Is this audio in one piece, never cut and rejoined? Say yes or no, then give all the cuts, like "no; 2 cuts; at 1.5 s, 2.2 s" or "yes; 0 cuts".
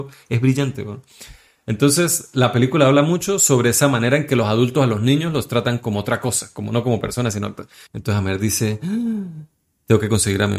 no; 1 cut; at 7.9 s